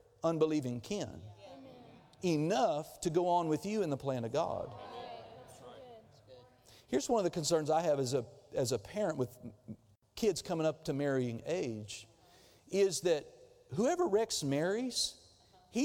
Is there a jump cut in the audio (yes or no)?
no